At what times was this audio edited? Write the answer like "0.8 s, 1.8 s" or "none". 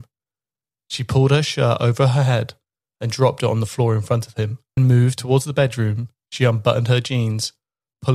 4.8 s